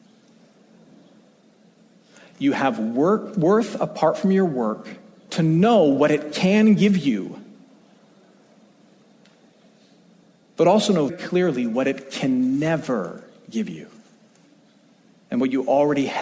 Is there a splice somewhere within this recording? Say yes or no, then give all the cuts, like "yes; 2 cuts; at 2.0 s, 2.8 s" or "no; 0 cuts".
yes; 2 cuts; at 5.3 s, 11.1 s